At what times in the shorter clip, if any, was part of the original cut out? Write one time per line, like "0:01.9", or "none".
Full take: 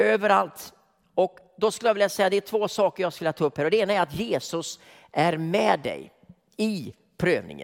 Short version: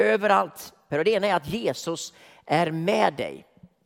0:00.9